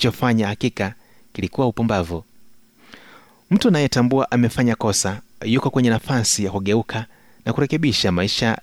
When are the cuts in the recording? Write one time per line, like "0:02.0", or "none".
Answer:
none